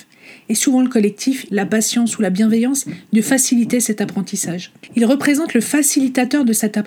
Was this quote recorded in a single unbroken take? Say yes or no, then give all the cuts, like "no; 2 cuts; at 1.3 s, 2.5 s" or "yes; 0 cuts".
no; 2 cuts; at 1.5 s, 4.9 s